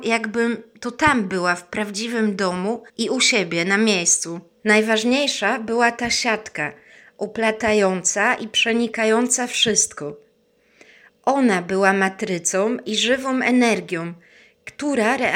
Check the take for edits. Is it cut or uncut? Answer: cut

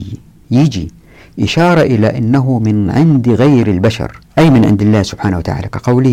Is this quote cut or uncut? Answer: cut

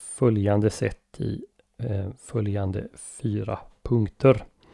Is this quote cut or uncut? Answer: uncut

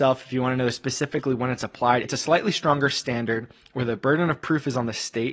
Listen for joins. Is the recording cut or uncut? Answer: cut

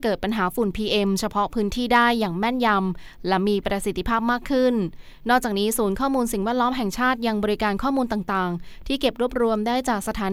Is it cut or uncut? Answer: uncut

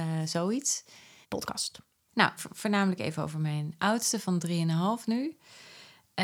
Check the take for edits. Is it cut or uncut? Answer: cut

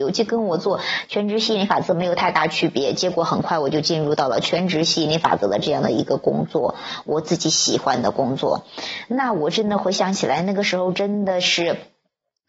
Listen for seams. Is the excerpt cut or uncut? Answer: uncut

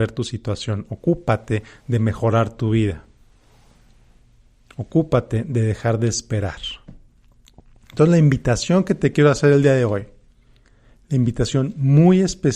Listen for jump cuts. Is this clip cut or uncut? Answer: uncut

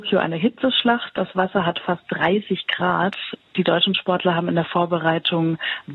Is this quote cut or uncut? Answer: uncut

